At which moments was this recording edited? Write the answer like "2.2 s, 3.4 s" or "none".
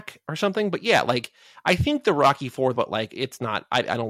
2.7 s